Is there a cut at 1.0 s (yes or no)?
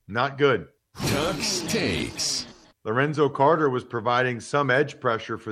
no